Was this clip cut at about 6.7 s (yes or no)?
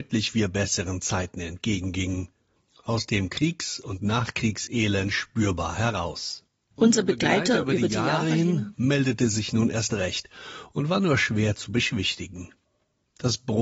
yes